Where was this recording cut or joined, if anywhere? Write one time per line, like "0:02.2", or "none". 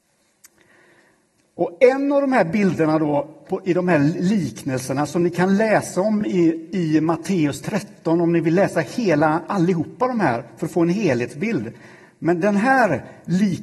none